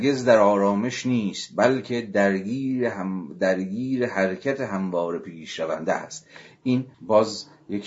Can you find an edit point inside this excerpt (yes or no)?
yes